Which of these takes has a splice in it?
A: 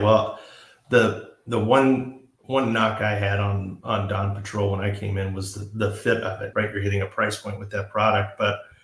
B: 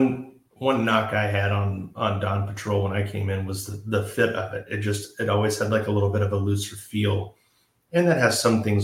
A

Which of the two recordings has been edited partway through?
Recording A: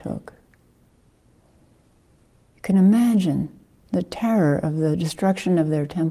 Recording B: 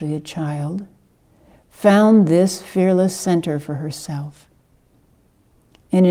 A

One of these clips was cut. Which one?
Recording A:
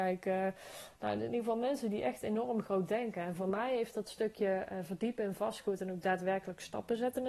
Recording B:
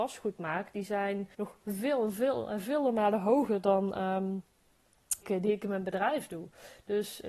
B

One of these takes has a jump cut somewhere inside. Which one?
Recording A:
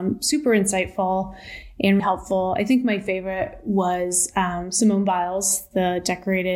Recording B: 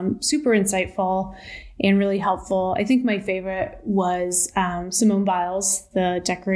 A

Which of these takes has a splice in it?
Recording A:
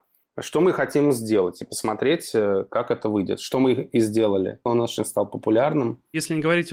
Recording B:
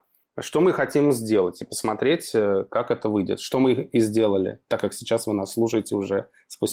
A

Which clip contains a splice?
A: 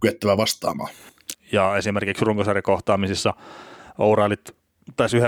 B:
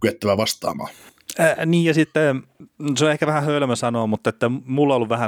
A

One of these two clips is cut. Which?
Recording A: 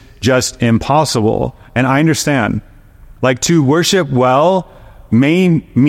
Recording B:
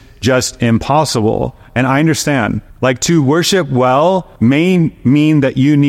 B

